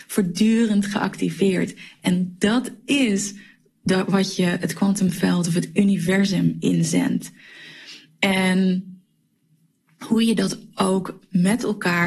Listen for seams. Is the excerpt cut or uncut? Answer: uncut